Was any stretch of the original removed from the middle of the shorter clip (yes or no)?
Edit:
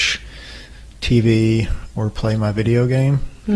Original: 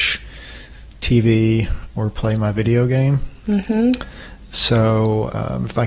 no